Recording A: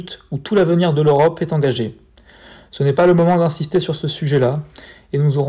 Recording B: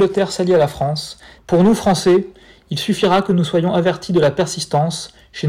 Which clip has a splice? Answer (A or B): B